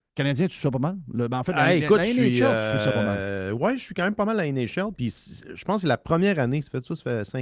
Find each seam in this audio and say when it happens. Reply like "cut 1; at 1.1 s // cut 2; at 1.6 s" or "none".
none